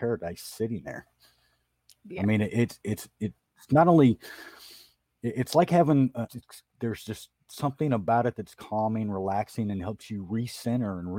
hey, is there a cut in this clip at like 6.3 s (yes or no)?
yes